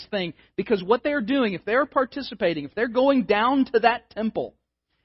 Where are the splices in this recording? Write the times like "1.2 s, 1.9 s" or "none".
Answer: none